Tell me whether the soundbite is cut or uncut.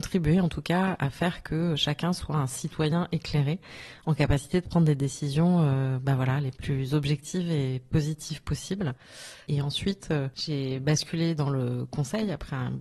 uncut